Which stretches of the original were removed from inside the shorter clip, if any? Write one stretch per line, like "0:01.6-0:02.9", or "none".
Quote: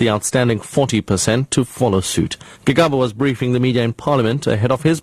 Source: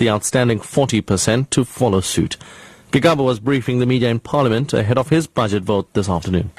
0:02.5-0:02.8